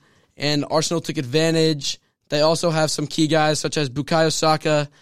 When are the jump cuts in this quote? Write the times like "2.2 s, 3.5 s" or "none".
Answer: 2.2 s

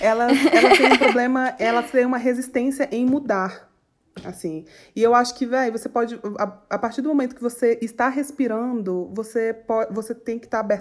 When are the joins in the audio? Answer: none

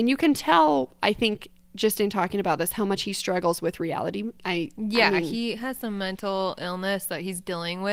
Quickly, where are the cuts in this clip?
4.4 s

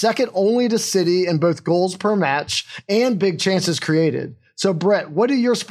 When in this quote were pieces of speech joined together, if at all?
none

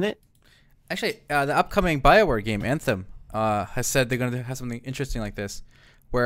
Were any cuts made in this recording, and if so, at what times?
none

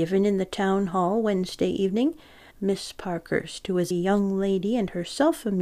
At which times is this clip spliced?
2.5 s, 3.9 s

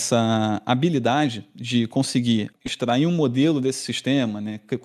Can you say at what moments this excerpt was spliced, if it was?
2.5 s

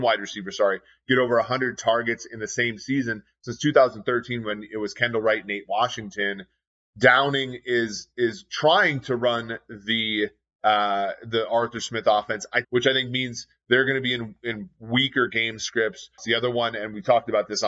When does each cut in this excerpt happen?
12.6 s, 16.2 s

